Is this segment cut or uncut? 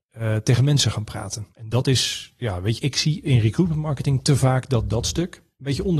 cut